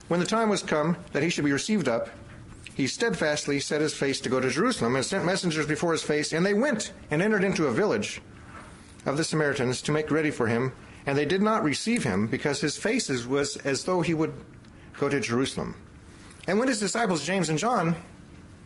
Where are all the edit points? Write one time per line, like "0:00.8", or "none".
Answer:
none